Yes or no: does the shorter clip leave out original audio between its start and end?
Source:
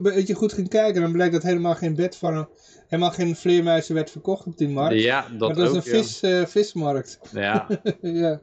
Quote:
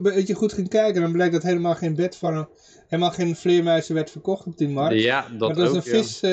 no